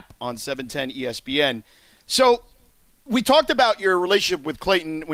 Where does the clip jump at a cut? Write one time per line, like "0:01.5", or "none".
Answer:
none